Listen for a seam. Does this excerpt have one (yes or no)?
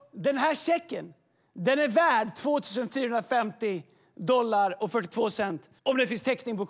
yes